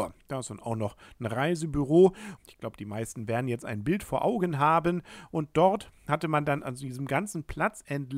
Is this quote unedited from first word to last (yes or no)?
no